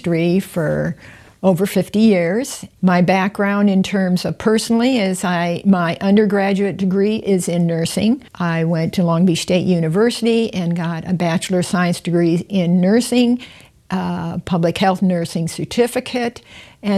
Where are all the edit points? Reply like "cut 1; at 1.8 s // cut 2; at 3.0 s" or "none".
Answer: cut 1; at 2.8 s // cut 2; at 8.3 s